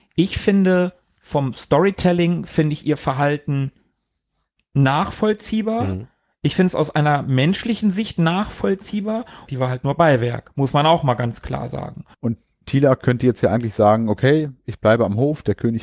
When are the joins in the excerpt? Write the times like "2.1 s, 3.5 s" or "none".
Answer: 9.5 s, 12.1 s